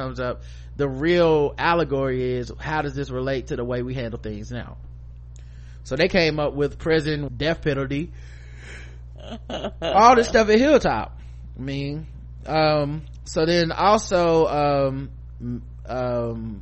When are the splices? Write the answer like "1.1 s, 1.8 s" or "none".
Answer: 7.3 s